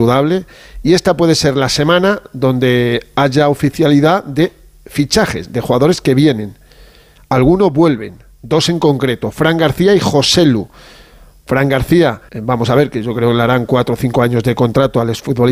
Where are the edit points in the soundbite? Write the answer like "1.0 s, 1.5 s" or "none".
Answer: 12.3 s